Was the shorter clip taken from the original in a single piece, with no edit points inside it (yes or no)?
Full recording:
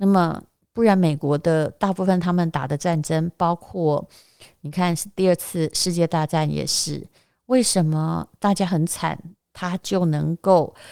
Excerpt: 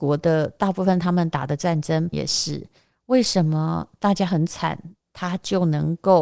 no